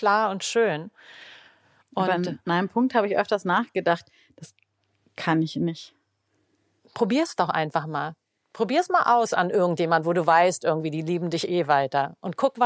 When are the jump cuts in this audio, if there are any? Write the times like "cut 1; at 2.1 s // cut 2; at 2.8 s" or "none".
none